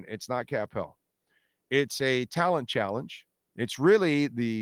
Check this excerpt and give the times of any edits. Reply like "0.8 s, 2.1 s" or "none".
3.5 s